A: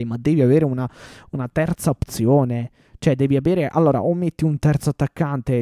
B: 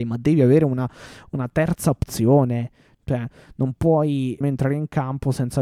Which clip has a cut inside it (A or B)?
B